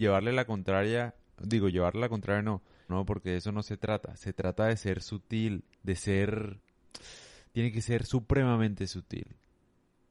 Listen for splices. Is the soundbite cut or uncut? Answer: cut